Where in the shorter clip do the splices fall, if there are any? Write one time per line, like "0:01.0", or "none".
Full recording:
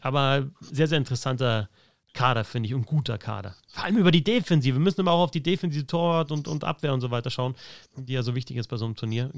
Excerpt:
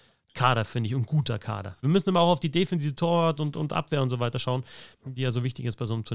0:01.8